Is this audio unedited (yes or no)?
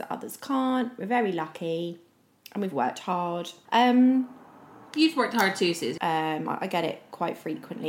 no